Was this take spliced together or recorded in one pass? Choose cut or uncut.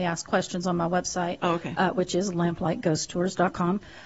uncut